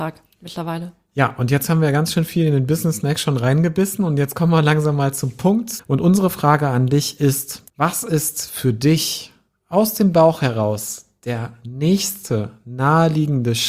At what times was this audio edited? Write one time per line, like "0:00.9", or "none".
0:05.8
0:07.7